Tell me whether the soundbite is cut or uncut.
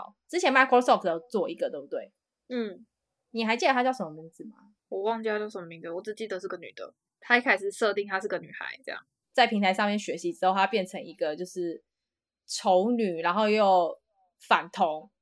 uncut